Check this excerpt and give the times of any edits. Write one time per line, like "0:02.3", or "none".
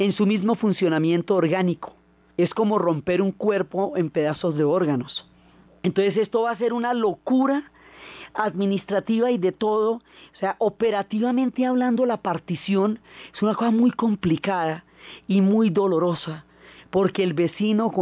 none